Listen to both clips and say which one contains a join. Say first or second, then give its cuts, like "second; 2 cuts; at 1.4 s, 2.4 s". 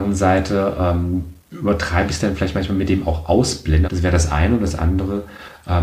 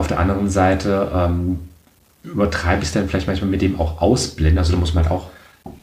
first; 2 cuts; at 1.4 s, 3.8 s